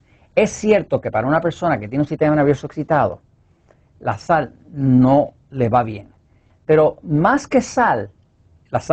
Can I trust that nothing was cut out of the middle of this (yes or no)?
no